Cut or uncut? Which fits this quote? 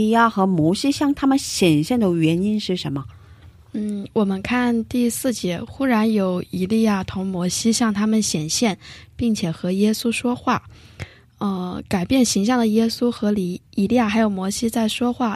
uncut